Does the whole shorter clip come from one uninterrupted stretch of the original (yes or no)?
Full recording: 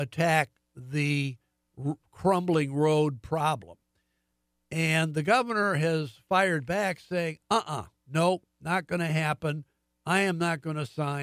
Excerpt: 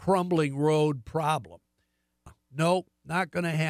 no